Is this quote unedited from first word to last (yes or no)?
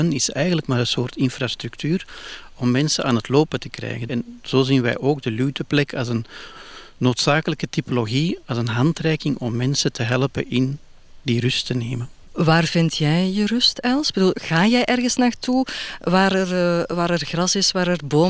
no